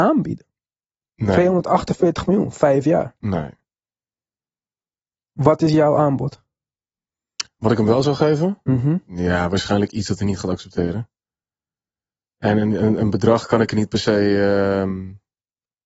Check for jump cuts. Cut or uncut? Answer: uncut